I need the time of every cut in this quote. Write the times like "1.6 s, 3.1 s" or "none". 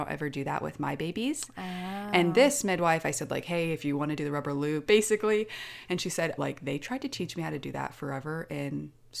4.9 s, 6.4 s